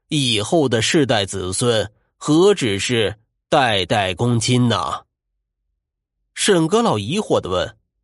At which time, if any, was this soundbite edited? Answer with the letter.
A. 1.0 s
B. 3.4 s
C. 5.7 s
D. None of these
D